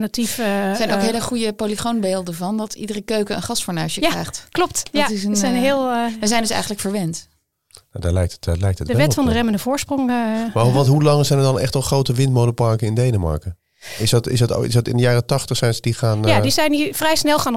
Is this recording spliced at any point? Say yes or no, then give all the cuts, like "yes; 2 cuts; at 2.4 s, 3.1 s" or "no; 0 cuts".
no; 0 cuts